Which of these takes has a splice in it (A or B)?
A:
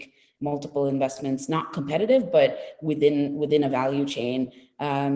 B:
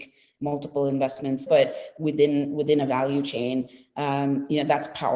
B